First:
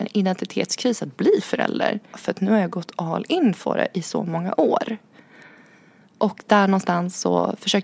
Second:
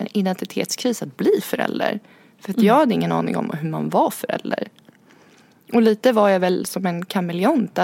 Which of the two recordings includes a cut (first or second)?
first